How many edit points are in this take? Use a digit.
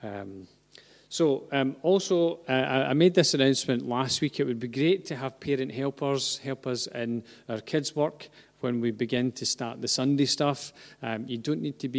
0